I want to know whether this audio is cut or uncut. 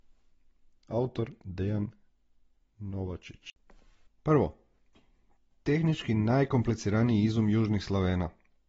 cut